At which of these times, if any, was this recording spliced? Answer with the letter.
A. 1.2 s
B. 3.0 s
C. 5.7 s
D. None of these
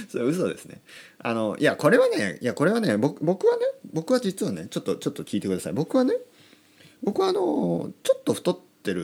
D